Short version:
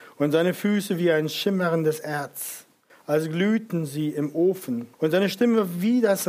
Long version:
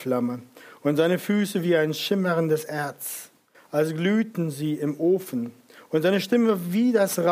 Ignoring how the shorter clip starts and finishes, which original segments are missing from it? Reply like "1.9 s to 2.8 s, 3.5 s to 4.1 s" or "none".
5.6 s to 5.8 s